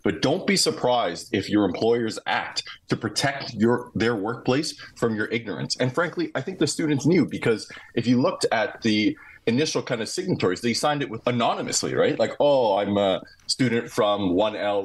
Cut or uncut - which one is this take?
cut